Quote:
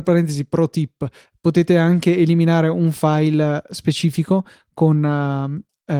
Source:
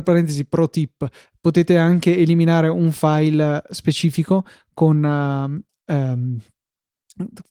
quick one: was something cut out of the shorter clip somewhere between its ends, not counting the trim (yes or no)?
no